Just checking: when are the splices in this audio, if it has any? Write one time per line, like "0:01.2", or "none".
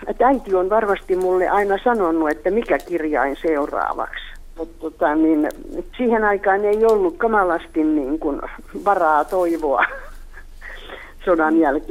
0:04.6
0:05.9